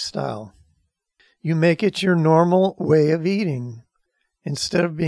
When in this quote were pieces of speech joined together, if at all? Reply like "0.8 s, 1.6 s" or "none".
none